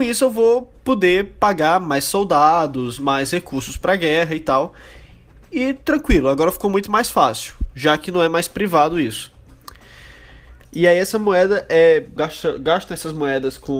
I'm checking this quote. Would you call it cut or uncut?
cut